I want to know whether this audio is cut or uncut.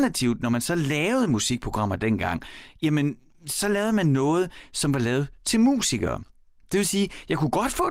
uncut